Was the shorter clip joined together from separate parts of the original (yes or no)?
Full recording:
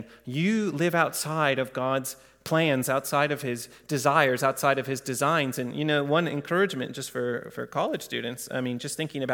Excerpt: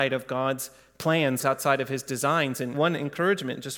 yes